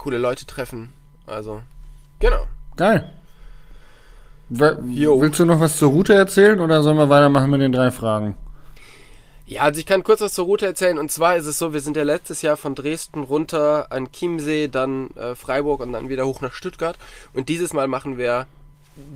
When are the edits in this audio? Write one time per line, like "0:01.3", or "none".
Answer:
none